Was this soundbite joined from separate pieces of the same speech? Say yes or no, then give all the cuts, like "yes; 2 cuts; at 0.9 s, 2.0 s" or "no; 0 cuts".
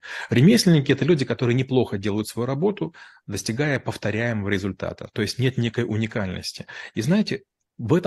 yes; 1 cut; at 6.9 s